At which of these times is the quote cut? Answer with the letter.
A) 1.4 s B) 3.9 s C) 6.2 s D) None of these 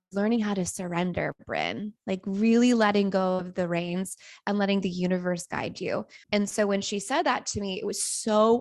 C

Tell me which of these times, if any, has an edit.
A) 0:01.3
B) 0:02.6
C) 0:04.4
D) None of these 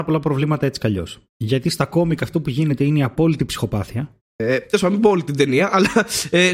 C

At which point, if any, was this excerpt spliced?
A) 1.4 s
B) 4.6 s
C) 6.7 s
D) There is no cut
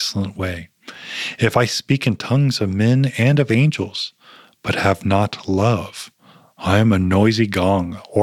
D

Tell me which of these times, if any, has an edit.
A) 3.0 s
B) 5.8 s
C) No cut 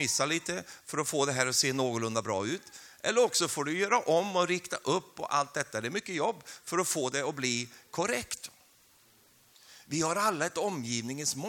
C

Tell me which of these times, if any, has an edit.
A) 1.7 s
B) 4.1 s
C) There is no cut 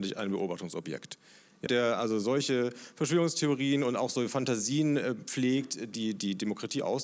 A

